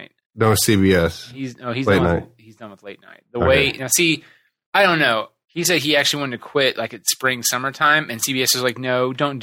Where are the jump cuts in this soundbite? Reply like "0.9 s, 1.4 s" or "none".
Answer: 5.4 s